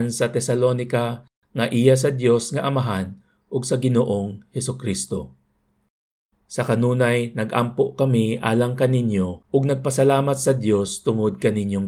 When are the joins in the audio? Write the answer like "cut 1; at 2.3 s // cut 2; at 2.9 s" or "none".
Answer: cut 1; at 6.3 s // cut 2; at 9.4 s